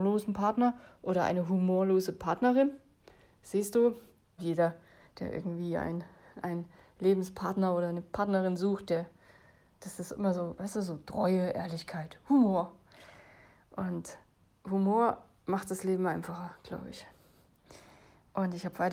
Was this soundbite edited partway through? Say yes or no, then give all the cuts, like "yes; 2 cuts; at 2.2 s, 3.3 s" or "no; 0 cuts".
yes; 1 cut; at 4.4 s